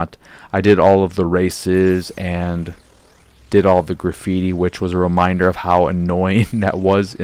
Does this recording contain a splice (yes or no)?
no